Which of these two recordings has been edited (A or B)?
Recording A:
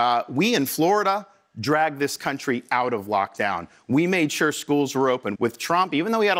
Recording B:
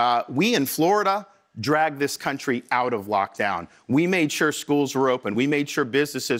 A